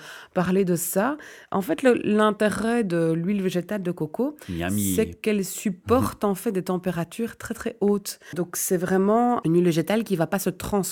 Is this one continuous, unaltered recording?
yes; 0 cuts

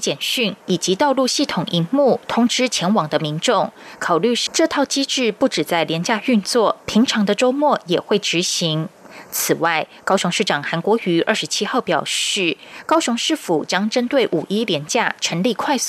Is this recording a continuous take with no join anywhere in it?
no; 1 cut; at 4.5 s

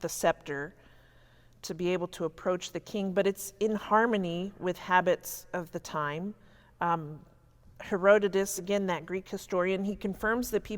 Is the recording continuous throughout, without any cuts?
yes; 0 cuts

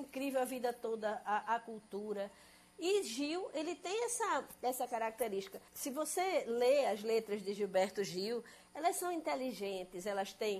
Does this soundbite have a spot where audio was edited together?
yes; 1 cut; at 5.7 s

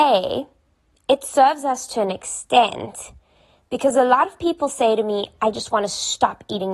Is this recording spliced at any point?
no; 0 cuts

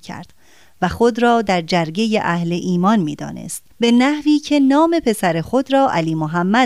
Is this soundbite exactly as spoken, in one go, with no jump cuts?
no; 1 cut; at 3.7 s

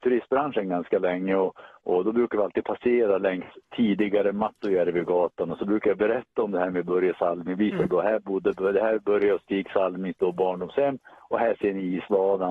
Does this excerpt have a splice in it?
no; 0 cuts

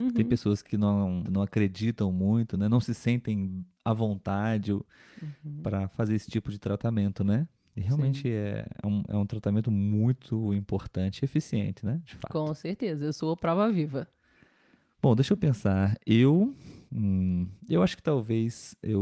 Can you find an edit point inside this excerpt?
yes; 1 cut; at 1.3 s

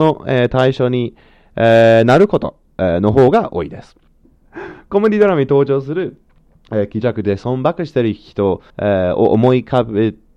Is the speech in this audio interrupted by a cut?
yes; 2 cuts; at 4.2 s, 8.7 s

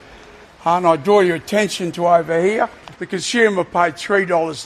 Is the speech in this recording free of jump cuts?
no; 1 cut; at 2.9 s

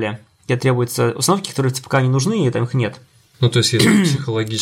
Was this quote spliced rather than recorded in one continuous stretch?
yes; 1 cut; at 3.3 s

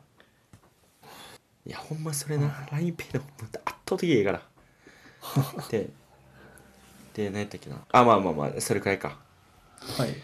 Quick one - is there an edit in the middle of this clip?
yes; 2 cuts; at 1.0 s, 7.8 s

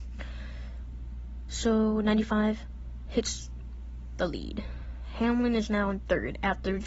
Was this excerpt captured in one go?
yes; 0 cuts

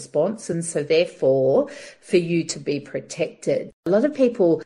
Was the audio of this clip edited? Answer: yes; 1 cut; at 3.7 s

